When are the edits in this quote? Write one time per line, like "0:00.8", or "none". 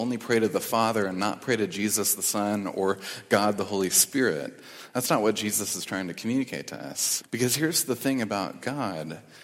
0:07.2